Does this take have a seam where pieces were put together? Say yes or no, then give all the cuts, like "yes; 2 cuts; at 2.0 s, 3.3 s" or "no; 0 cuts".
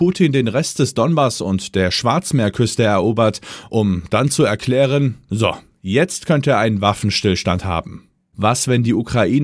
no; 0 cuts